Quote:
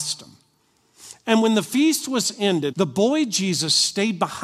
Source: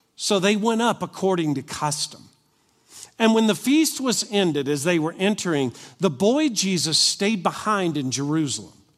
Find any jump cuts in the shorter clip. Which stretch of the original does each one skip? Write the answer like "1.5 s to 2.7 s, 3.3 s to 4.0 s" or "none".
4.6 s to 6.0 s